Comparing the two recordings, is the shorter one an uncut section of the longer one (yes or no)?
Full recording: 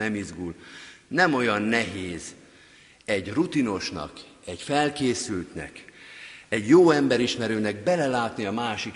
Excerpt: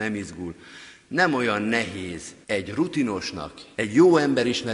no